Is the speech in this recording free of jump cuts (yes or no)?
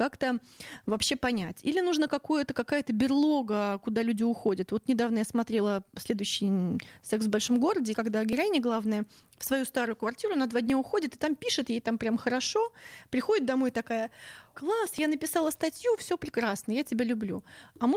no